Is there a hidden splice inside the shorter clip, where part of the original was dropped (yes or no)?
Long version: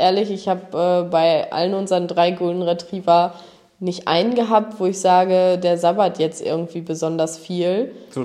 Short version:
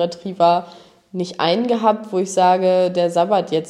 no